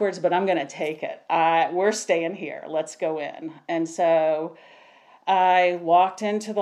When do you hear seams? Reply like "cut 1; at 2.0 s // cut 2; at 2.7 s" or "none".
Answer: none